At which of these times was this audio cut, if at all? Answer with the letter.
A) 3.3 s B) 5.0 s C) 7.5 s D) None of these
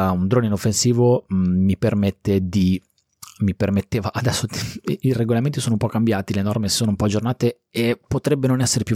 D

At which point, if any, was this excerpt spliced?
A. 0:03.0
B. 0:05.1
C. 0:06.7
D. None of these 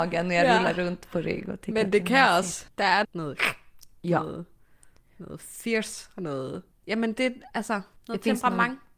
A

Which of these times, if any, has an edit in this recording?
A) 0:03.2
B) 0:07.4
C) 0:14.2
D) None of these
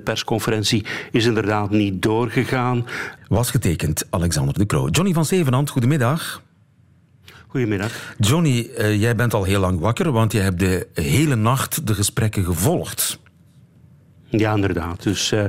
A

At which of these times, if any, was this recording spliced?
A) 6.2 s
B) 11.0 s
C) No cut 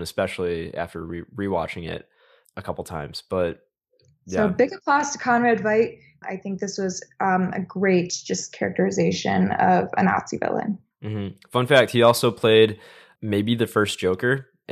A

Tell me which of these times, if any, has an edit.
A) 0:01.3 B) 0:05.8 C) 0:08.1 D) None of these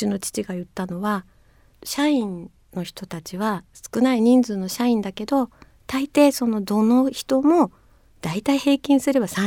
D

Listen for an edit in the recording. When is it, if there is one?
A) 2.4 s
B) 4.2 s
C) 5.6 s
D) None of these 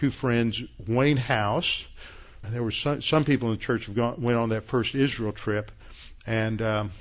A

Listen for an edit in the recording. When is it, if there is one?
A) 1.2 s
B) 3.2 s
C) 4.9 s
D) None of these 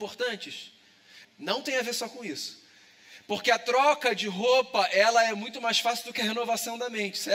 A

